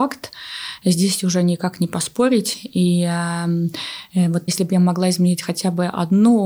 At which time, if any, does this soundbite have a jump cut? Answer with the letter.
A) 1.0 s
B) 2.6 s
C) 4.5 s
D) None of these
C